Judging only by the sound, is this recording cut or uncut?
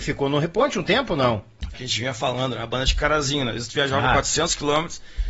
cut